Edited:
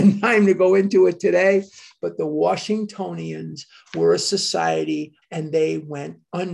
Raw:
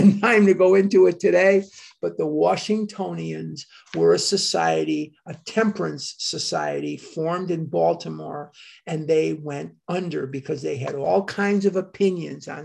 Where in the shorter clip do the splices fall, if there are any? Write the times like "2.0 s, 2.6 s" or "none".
5.2 s